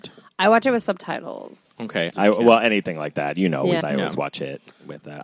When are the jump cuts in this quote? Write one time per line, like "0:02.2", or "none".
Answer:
0:02.1
0:03.8